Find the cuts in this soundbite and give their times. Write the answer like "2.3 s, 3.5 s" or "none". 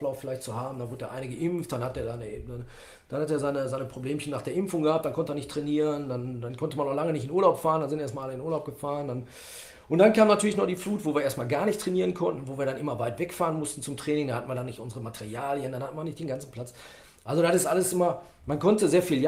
none